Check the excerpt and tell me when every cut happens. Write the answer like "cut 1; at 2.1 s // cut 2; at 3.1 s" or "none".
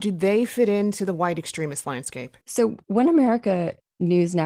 cut 1; at 2.4 s